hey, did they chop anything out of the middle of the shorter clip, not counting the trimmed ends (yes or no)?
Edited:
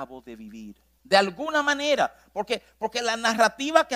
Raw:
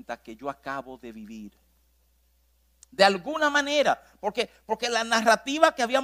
yes